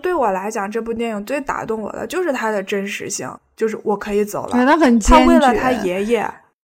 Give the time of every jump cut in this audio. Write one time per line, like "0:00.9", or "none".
0:03.4